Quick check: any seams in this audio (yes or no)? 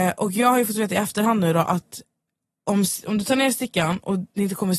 no